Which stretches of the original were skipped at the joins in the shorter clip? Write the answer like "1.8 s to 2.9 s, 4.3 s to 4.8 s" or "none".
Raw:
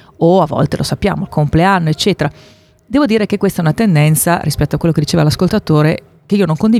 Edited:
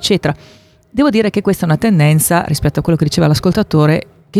none